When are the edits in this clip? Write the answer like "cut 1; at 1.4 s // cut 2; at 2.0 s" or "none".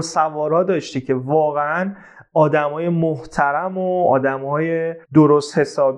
cut 1; at 5.0 s